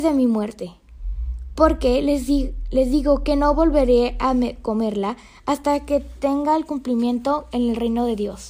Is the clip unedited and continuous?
yes; 0 cuts

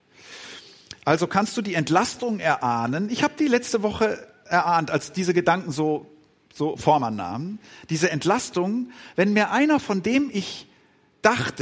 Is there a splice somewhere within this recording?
no; 0 cuts

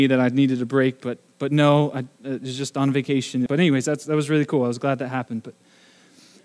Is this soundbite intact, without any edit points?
no; 1 cut; at 3.5 s

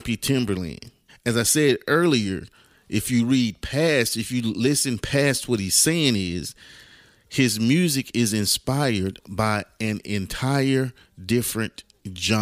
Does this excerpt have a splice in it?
yes; 1 cut; at 1.1 s

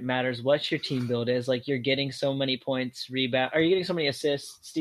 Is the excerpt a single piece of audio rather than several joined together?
yes; 0 cuts

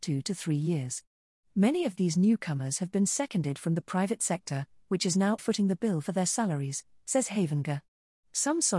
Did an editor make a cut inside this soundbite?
yes; 1 cut; at 5.4 s

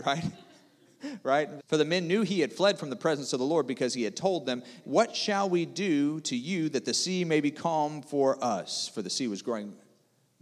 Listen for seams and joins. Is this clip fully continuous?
no; 2 cuts; at 1.6 s, 4.8 s

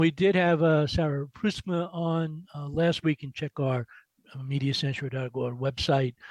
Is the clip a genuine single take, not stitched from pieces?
yes; 0 cuts

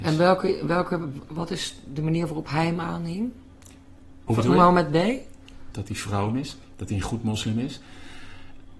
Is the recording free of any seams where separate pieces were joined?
no; 1 cut; at 5.7 s

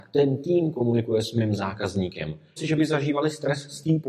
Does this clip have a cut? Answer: yes; 1 cut; at 2.6 s

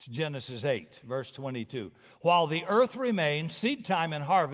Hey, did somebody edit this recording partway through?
no; 0 cuts

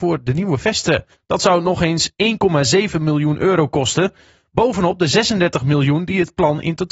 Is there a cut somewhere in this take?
yes; 1 cut; at 1.1 s

